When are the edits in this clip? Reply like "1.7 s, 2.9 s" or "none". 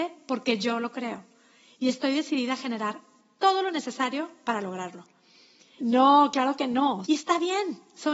5.8 s, 7.0 s